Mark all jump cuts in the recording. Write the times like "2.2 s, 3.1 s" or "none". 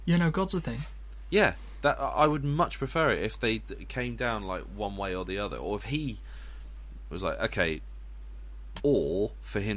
7.1 s, 8.8 s